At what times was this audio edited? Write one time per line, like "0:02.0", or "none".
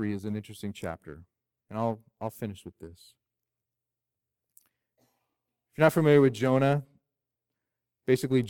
none